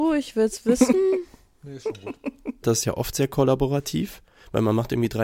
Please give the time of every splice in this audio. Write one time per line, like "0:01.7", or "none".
0:02.6